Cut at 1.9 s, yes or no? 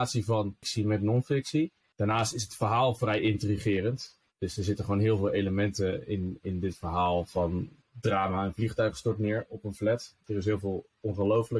yes